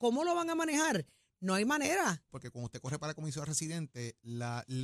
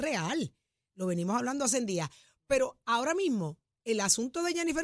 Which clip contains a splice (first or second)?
first